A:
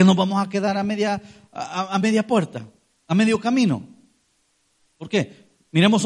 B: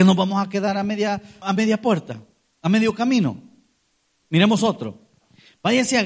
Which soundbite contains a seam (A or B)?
B